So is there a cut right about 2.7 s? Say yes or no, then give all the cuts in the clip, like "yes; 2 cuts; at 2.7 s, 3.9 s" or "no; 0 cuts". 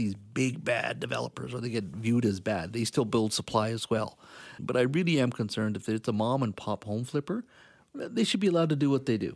no; 1 cut; at 4.6 s